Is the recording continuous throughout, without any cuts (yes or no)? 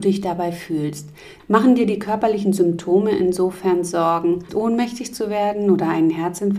no